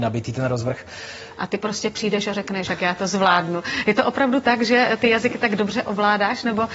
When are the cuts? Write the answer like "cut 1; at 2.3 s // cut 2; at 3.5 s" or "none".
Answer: cut 1; at 1.3 s // cut 2; at 2.7 s